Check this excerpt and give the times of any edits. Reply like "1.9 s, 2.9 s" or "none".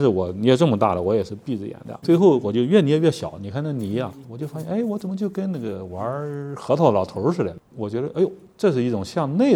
2.0 s, 4.2 s